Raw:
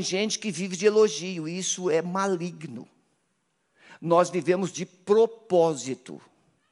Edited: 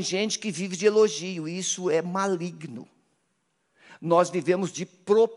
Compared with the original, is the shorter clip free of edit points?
yes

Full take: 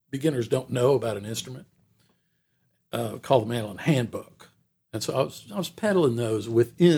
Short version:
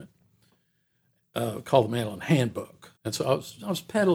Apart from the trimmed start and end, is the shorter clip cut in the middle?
yes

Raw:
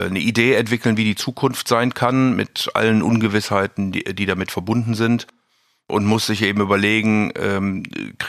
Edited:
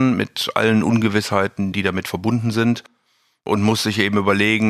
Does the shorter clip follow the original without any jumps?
no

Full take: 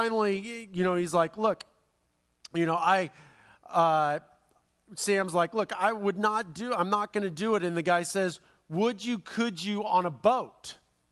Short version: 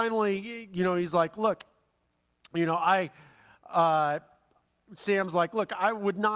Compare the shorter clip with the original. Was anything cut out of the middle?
no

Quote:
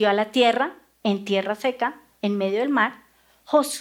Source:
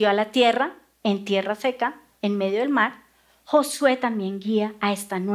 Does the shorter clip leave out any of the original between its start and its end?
no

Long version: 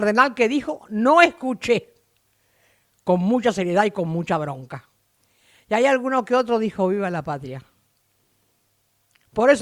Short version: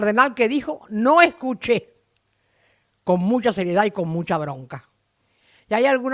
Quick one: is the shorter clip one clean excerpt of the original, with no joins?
yes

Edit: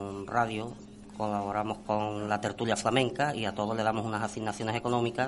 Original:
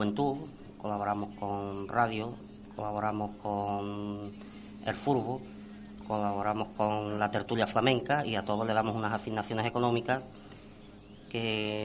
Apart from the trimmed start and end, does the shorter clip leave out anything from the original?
yes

